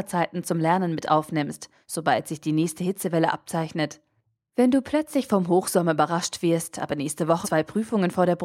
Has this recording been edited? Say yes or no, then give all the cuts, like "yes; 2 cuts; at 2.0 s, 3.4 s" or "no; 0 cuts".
yes; 1 cut; at 7.4 s